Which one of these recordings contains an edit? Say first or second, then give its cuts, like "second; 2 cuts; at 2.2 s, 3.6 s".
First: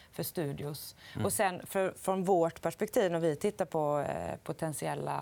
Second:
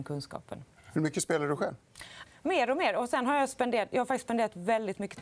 second; 1 cut; at 2.3 s